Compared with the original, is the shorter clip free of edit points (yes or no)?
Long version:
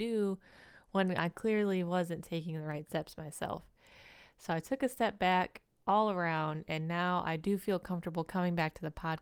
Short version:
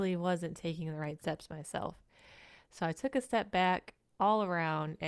yes